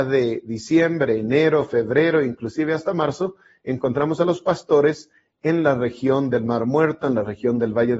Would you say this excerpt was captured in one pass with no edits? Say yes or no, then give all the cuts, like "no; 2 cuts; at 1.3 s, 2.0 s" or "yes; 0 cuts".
yes; 0 cuts